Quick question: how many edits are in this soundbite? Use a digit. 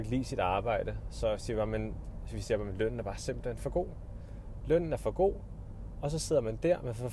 0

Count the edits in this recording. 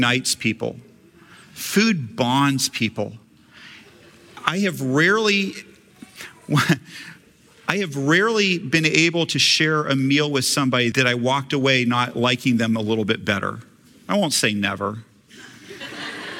1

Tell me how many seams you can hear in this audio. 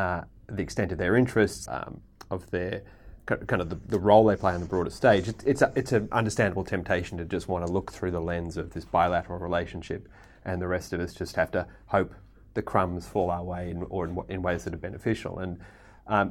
1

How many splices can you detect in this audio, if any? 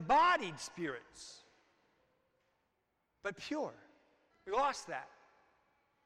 1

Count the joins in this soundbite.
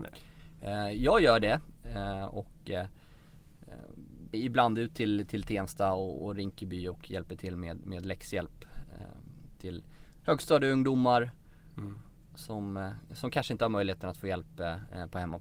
1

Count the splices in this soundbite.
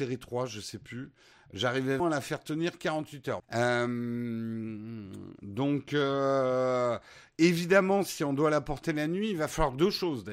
2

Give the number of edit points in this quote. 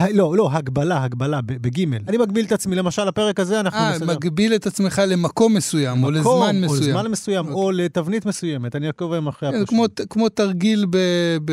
1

